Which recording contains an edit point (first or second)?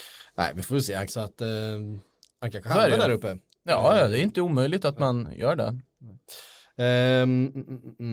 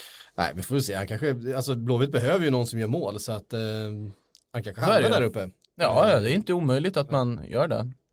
first